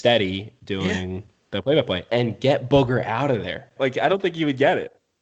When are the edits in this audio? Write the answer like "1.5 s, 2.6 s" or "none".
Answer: 3.8 s

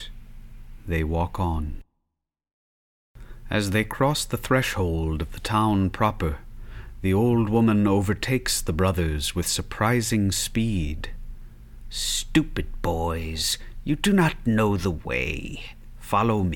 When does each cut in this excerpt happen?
none

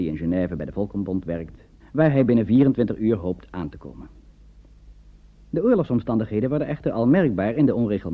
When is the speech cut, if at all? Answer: 1.8 s

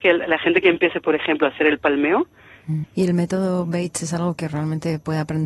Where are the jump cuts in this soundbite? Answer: 2.8 s

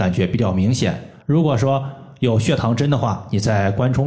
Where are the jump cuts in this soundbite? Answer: 1.2 s

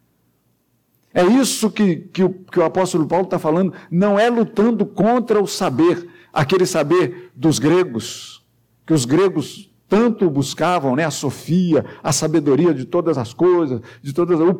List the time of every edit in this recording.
none

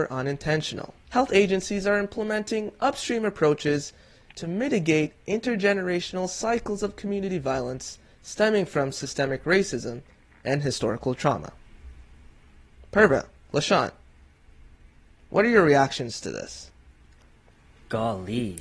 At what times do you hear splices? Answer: 1.0 s

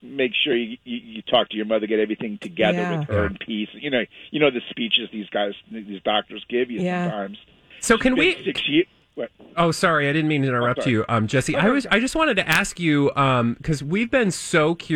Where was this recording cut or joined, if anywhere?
none

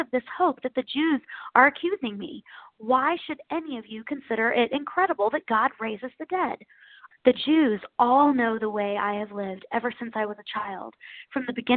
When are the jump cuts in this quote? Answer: 7.1 s

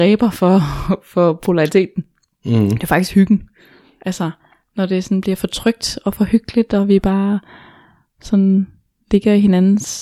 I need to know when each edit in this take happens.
none

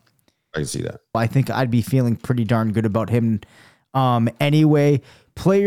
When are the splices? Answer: 1.1 s

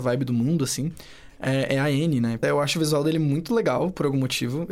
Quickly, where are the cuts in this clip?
2.4 s

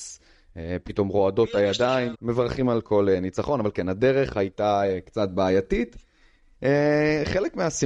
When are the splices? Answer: 2.1 s

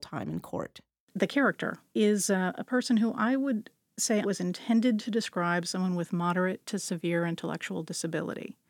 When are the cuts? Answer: 1.1 s, 4.2 s

